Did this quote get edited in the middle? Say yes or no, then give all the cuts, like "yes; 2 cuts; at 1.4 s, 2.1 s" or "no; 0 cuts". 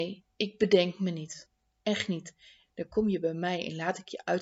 yes; 1 cut; at 2.6 s